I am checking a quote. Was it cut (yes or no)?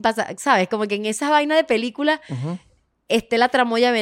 no